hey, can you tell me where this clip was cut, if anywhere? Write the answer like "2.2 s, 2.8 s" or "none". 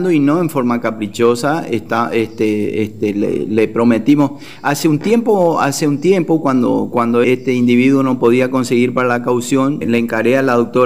7.2 s, 9.8 s